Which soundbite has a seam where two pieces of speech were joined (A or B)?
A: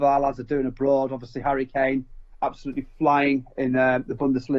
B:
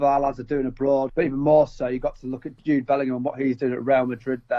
B